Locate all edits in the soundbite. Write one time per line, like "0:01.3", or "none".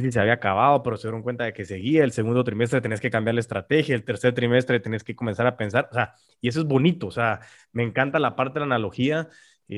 none